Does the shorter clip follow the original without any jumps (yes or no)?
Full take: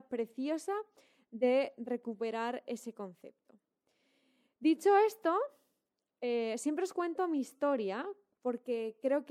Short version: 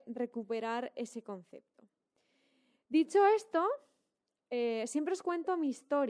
yes